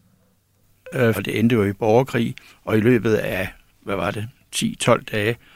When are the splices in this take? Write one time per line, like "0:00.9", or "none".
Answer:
0:01.1